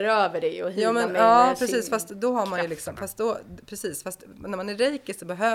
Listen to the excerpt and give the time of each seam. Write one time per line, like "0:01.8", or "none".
none